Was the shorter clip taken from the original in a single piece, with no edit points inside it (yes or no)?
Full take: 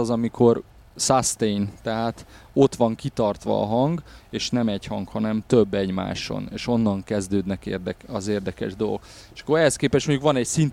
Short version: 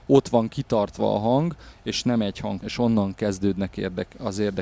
no